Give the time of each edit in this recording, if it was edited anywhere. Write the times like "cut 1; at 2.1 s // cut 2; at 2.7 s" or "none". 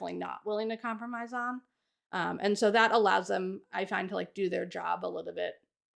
none